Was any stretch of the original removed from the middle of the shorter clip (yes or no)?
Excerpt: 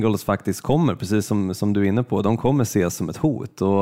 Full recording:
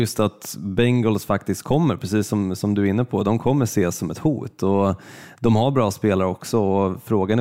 no